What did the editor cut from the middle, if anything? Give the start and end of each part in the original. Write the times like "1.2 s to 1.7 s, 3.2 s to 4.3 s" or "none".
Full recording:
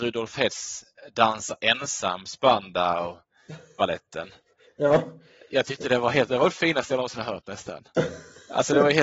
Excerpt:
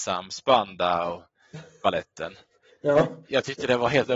5.2 s to 5.5 s